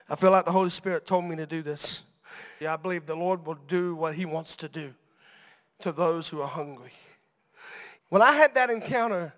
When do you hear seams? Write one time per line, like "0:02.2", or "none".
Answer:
0:02.6
0:08.0